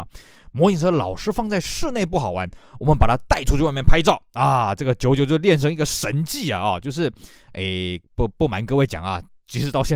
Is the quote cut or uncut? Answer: uncut